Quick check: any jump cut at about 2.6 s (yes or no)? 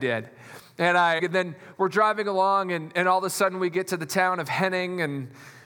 no